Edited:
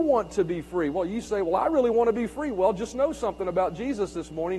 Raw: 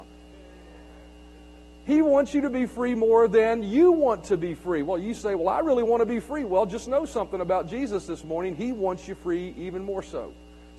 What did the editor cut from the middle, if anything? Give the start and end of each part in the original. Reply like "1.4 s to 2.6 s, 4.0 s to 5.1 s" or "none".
none